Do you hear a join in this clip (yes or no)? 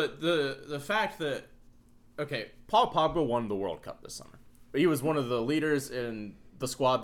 no